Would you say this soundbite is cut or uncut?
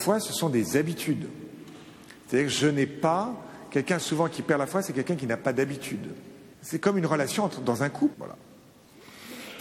cut